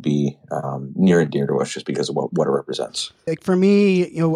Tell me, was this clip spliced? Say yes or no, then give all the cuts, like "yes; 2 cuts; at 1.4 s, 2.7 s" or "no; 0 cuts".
yes; 1 cut; at 3.3 s